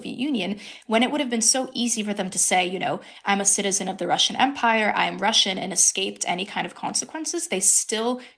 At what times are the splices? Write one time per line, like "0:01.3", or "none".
none